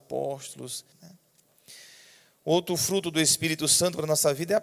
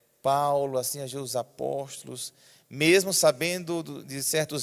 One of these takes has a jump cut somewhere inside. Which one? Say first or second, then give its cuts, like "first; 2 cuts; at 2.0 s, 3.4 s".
first; 1 cut; at 0.9 s